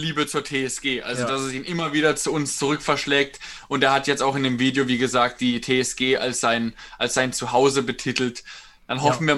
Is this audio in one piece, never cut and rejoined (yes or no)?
yes